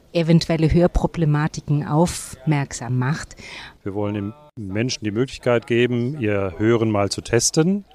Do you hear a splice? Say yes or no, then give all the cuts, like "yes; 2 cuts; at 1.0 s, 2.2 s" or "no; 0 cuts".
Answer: yes; 1 cut; at 3.8 s